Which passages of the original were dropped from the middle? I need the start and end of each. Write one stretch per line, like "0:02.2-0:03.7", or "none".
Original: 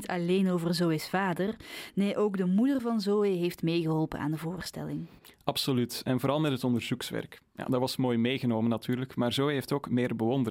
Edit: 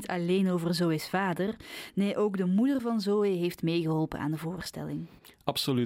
none